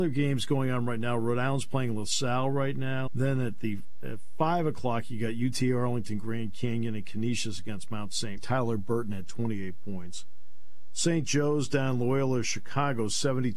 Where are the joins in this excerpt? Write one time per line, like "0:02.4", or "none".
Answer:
0:03.1
0:08.4